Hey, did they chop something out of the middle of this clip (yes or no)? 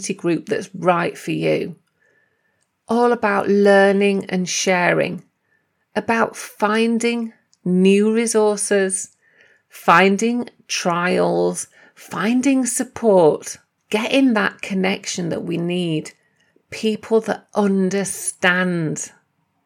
no